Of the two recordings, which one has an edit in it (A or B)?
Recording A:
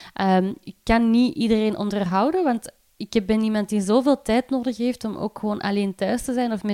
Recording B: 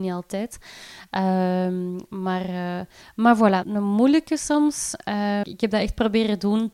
B